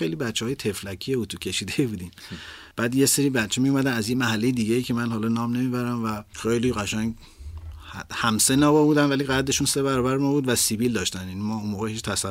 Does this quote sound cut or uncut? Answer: cut